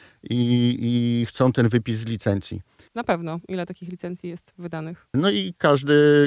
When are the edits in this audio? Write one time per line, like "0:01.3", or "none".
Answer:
0:02.9
0:05.1

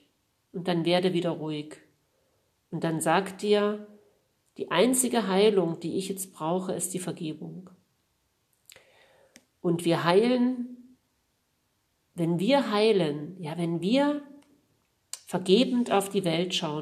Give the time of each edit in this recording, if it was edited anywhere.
none

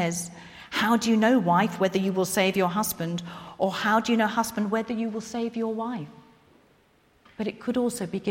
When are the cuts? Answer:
none

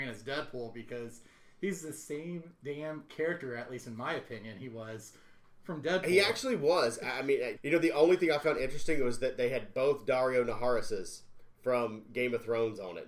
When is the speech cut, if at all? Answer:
0:07.6

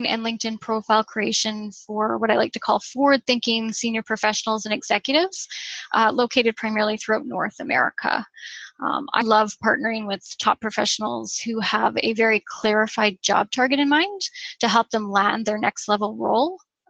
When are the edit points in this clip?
0:09.2

